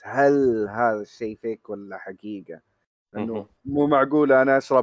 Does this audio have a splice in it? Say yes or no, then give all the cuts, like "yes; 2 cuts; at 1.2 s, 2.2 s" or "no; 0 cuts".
no; 0 cuts